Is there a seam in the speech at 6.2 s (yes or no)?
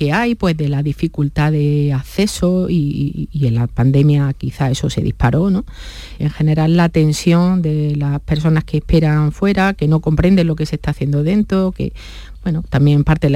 yes